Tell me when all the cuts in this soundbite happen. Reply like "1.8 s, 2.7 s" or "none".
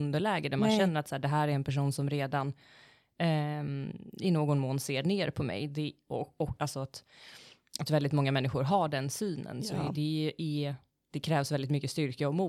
6.6 s